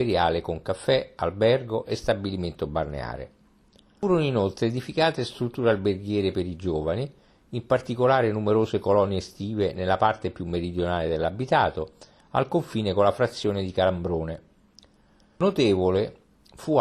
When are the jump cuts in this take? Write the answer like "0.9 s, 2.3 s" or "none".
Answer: none